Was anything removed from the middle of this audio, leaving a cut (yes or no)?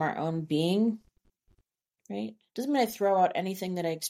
no